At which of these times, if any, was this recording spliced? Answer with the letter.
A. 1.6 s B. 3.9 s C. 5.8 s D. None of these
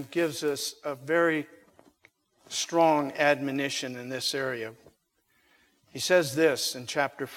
D